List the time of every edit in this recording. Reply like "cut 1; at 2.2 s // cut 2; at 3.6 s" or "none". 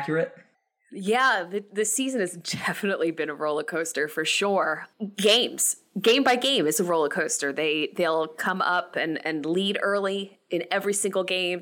none

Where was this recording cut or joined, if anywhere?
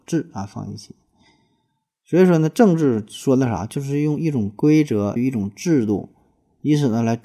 cut 1; at 5.2 s

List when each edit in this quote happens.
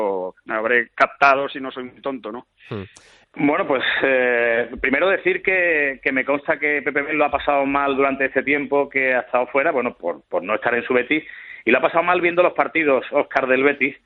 cut 1; at 3.2 s

